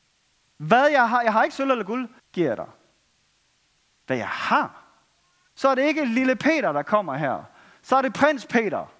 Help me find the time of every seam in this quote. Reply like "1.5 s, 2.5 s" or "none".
2.2 s, 5.5 s